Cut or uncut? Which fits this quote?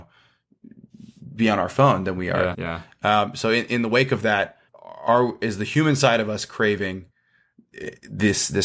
cut